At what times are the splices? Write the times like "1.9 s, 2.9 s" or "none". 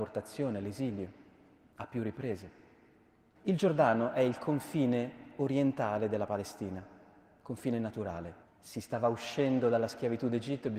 3.3 s, 8.4 s